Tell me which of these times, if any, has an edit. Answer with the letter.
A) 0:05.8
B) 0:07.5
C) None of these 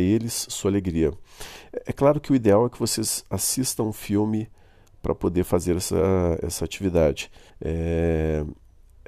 B